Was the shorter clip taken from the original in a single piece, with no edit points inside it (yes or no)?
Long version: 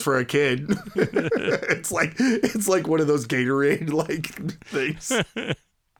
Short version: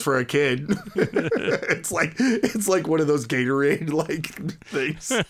yes